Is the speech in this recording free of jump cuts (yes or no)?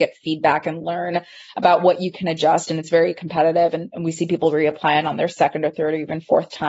yes